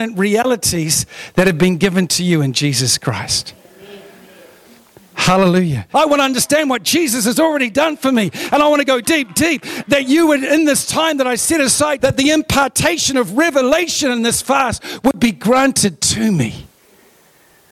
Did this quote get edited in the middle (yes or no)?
yes